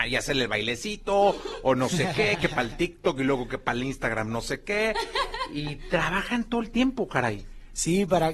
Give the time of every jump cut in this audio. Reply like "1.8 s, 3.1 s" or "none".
none